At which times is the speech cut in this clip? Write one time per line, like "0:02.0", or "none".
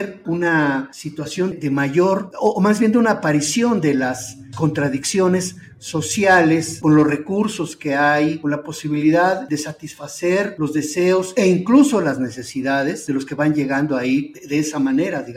0:01.5
0:06.8